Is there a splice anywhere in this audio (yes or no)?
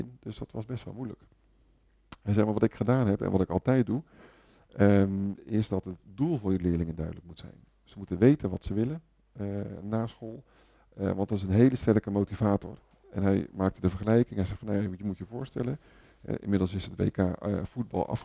no